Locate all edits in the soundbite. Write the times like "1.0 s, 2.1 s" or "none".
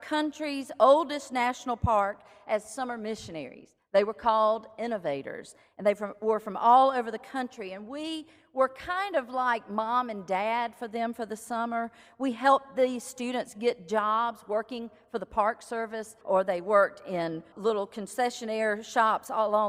16.2 s, 17.5 s